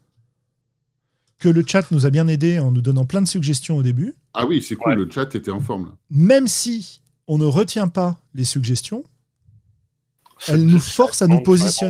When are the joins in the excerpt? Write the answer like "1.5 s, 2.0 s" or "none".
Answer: none